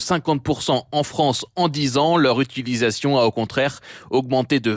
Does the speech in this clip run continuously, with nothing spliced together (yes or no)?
yes